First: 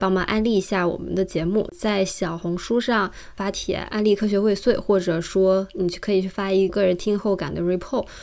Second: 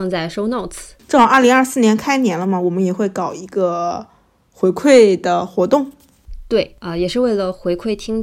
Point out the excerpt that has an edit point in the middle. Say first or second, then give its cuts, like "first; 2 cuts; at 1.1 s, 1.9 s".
first; 1 cut; at 6.7 s